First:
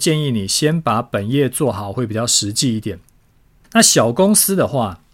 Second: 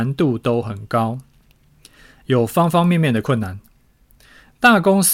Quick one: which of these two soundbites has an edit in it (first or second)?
first